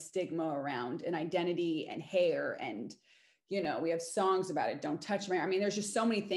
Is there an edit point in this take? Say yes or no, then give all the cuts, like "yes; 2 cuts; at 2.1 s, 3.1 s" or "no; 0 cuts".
no; 0 cuts